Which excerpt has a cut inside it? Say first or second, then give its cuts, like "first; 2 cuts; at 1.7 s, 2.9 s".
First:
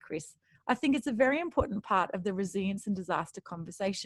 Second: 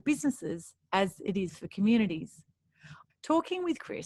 second; 1 cut; at 3.0 s